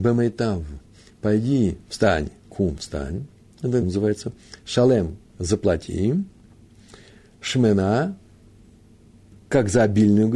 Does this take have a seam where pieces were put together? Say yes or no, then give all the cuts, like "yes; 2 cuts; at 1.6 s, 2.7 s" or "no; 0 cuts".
yes; 1 cut; at 3.8 s